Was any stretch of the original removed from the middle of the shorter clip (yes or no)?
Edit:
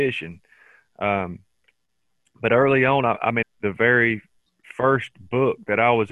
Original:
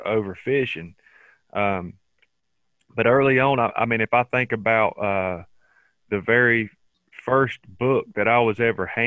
yes